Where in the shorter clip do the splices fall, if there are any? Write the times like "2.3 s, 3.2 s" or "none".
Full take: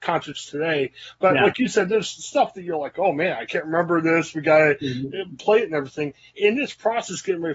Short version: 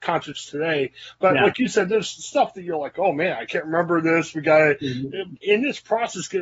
5.4 s